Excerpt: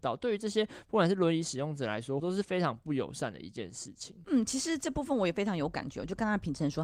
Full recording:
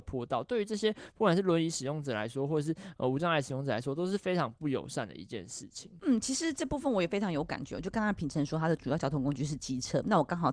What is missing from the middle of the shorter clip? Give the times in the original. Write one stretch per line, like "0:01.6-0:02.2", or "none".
0:02.5-0:03.9